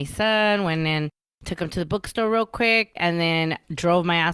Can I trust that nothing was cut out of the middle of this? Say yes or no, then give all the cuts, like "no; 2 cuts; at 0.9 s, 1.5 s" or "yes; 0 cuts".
no; 1 cut; at 3.0 s